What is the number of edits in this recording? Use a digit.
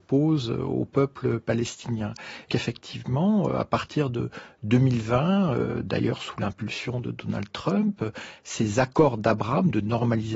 1